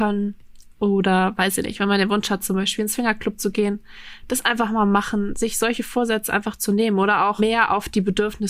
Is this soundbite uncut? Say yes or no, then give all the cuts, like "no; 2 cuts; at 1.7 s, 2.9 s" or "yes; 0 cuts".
yes; 0 cuts